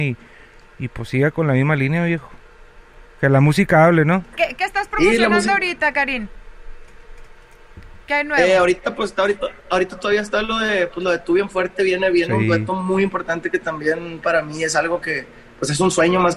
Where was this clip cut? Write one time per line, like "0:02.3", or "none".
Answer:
0:04.3